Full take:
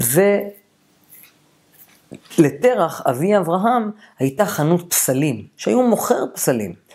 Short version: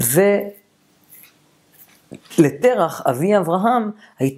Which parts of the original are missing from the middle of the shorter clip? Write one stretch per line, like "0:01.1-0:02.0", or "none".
none